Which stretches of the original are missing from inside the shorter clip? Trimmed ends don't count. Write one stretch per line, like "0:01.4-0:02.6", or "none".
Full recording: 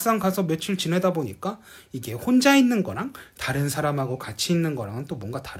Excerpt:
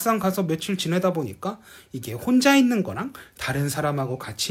none